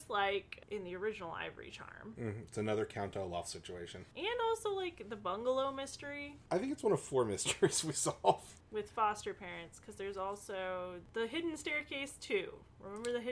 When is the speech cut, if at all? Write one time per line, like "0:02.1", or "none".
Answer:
none

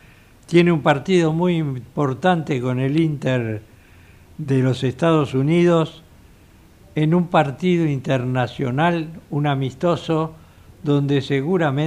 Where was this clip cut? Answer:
none

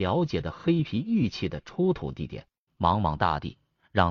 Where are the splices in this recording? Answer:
0:02.7

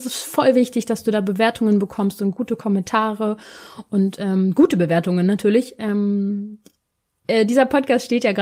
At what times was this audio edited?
0:05.8

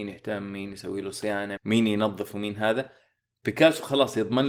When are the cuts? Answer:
0:01.6

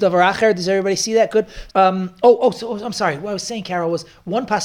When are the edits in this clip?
0:01.7

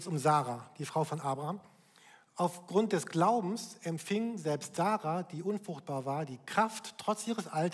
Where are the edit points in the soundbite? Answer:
none

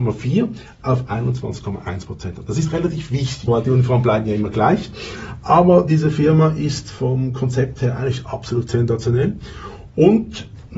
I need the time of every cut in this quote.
0:03.5

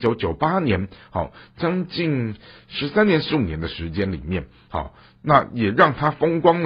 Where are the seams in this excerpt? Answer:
none

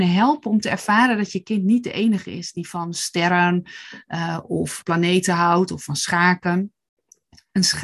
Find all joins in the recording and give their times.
0:04.8

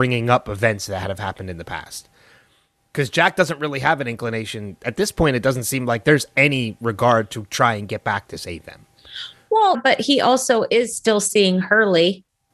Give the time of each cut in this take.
0:09.7

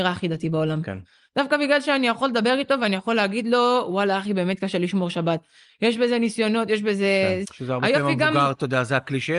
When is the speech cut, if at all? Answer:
0:07.4

